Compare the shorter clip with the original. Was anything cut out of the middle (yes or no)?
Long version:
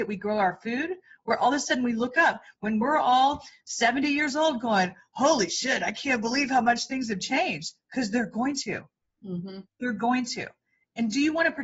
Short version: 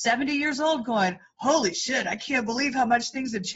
no